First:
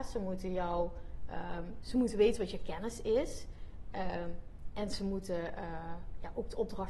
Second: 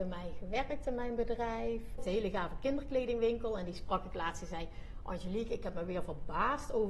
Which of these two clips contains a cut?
second; 1 cut; at 2.0 s

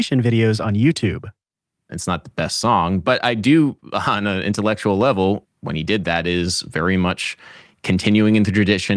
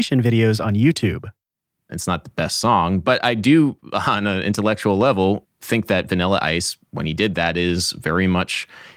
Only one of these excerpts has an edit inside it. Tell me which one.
first; 1 cut; at 5.6 s

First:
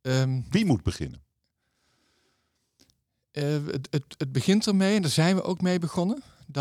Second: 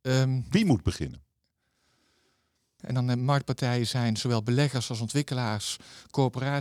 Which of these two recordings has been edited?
second; 1 cut; at 2.8 s

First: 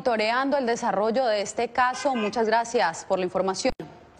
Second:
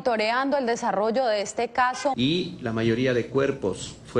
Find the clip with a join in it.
second; 1 cut; at 2.1 s

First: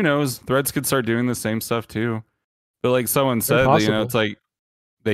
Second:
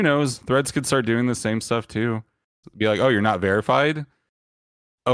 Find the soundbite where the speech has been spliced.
second; 1 cut; at 2.6 s

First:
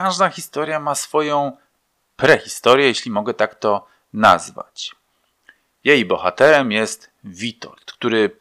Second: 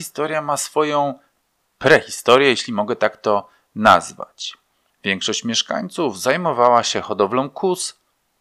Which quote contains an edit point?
second; 1 cut; at 4.9 s

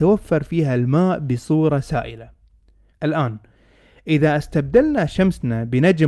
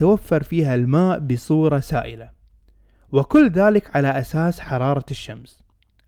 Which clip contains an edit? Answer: first; 1 cut; at 2.9 s

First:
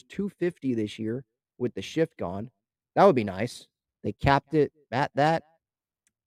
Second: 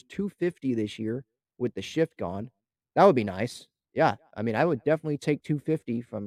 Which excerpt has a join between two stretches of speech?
first; 1 cut; at 3.9 s

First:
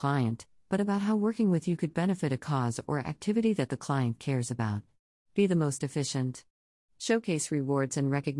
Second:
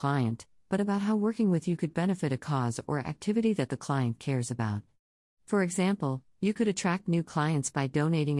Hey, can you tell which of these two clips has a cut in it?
first; 1 cut; at 5.3 s

